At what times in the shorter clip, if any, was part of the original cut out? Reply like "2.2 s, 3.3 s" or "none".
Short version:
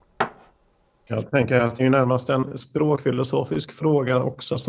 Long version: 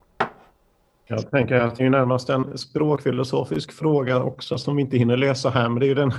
none